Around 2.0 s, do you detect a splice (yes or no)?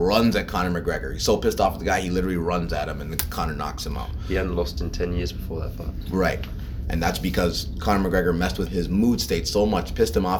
no